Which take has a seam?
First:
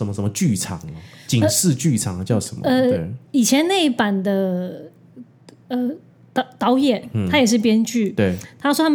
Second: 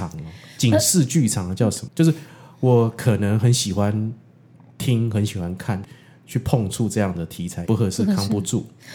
second; 3 cuts; at 1.9 s, 5.8 s, 7.6 s

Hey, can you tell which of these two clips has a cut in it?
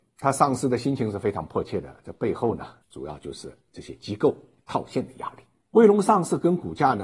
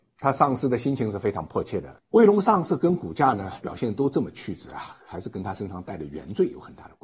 second; 1 cut; at 2.0 s

